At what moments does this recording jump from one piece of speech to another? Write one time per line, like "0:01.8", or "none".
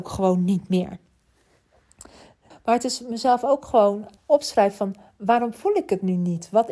0:02.5
0:04.2

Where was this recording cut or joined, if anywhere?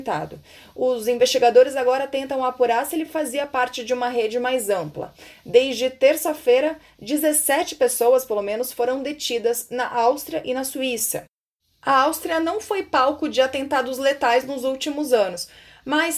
none

